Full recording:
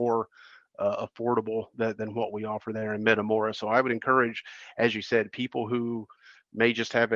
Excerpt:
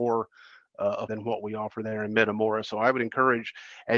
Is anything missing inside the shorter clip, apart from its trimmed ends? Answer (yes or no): yes